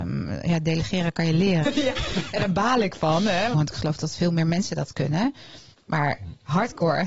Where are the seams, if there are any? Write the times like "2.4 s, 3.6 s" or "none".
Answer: 1.6 s, 3.5 s, 5.7 s